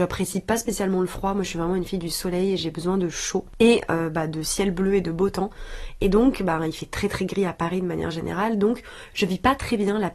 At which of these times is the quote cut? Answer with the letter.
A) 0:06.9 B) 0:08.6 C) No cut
C